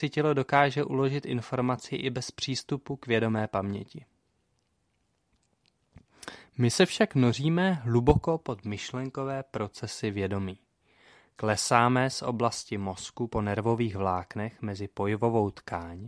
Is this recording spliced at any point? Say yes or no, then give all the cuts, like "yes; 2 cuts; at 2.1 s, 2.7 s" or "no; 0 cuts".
no; 0 cuts